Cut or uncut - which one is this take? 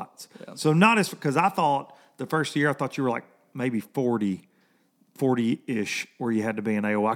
uncut